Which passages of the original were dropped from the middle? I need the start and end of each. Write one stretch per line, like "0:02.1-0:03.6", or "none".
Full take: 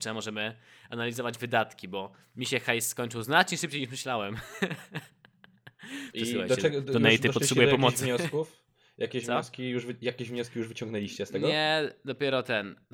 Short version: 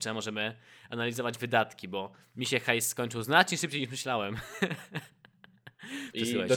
none